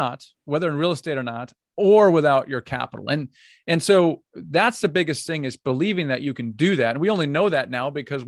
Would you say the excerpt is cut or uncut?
uncut